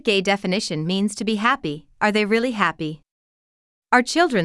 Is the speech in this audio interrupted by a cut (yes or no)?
no